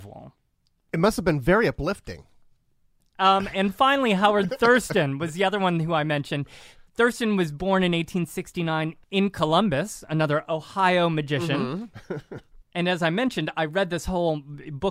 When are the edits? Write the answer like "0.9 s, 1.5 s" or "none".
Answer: none